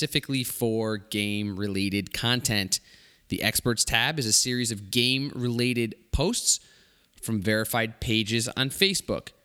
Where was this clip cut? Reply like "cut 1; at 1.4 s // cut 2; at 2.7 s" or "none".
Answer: none